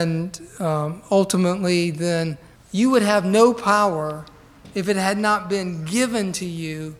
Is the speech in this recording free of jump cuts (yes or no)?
no